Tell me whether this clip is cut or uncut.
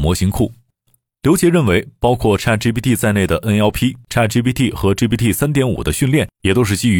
cut